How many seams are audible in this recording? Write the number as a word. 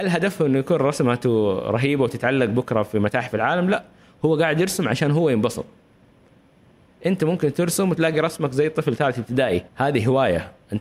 one